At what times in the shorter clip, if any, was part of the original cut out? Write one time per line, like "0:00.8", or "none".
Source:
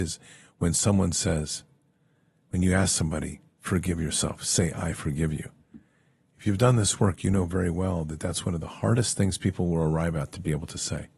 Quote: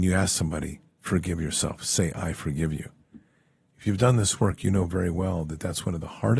none

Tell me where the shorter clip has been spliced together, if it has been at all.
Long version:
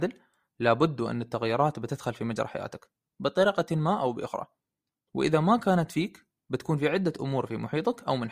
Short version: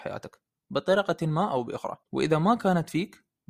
0:02.0

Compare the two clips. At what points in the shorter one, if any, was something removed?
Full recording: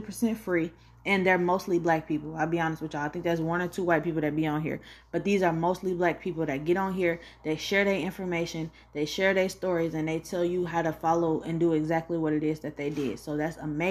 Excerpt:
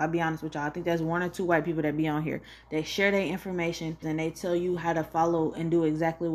0:02.6
0:04.0

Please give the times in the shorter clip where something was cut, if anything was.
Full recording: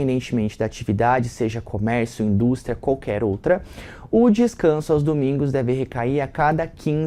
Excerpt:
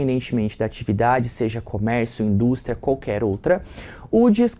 none

